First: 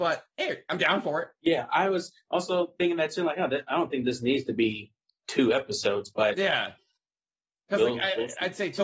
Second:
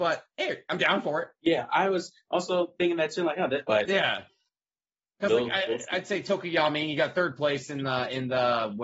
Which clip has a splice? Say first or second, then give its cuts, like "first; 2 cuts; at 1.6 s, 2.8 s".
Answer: second; 1 cut; at 3.7 s